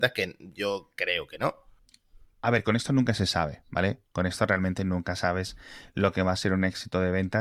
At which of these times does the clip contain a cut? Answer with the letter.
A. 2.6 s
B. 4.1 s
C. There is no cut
C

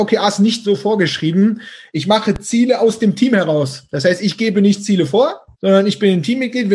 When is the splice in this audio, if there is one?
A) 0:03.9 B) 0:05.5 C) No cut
B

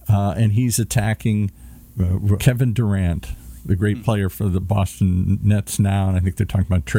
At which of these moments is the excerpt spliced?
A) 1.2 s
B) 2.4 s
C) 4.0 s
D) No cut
B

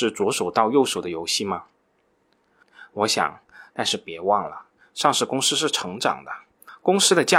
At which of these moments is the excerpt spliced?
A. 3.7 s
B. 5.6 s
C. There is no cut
A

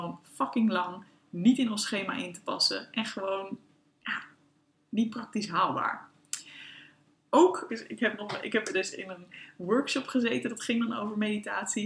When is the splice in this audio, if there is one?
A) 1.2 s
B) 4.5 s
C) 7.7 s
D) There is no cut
C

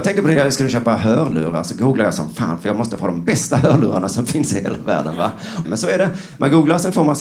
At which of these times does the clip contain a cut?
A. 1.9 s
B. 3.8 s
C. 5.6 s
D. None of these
C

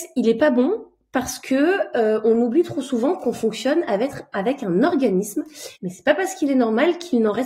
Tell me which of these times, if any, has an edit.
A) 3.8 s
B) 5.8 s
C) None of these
B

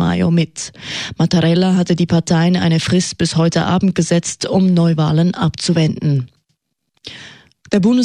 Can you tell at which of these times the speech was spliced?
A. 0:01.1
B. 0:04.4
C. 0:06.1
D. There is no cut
A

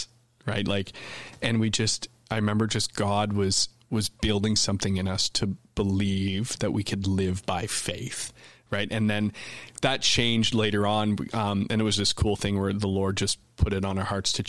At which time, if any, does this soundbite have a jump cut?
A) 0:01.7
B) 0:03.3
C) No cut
C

